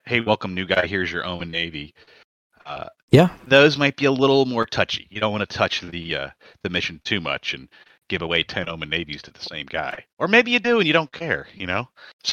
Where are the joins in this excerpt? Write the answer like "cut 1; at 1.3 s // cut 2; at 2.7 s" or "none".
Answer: none